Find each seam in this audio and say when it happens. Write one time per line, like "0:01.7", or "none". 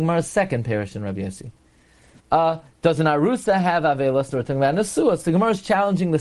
0:02.2
0:04.3